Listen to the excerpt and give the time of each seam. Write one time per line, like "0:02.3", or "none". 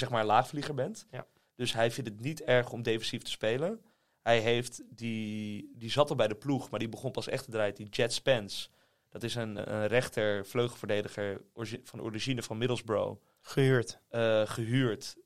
0:09.6